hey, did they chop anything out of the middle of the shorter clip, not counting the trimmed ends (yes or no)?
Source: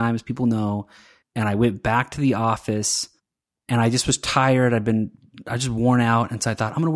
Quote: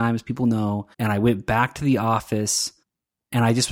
yes